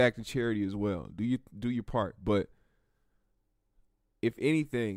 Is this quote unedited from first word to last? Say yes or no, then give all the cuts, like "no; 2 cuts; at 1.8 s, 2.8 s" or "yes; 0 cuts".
yes; 0 cuts